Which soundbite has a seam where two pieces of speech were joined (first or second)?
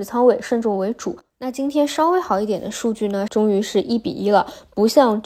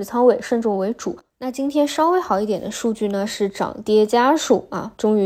first